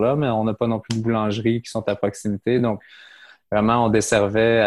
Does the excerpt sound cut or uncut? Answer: uncut